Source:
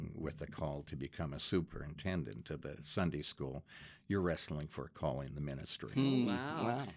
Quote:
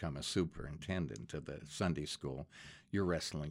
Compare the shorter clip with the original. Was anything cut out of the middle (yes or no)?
no